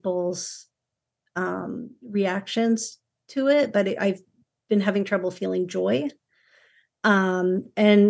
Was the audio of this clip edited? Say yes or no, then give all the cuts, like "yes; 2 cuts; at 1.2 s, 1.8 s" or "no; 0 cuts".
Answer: no; 0 cuts